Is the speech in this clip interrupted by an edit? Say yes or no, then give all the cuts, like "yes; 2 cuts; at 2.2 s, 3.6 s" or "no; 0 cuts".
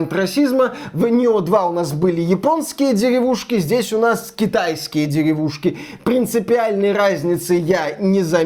no; 0 cuts